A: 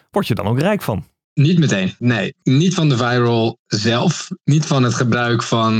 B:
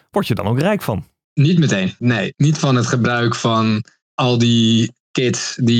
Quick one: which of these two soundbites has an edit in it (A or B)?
B